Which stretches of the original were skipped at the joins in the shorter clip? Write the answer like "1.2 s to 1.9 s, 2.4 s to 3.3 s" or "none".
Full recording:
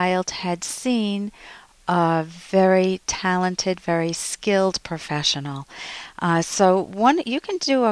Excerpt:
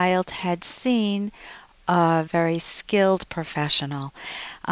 2.3 s to 3.8 s